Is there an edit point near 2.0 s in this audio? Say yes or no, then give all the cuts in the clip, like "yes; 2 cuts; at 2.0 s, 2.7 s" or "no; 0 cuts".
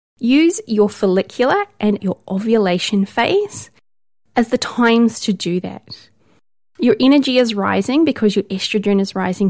yes; 1 cut; at 2.0 s